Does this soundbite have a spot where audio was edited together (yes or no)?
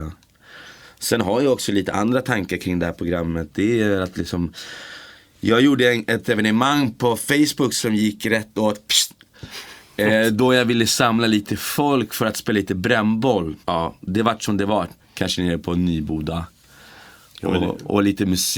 yes